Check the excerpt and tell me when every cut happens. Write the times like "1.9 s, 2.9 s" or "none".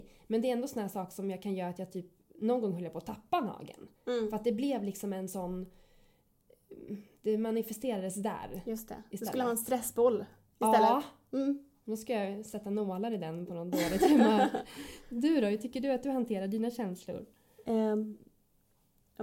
none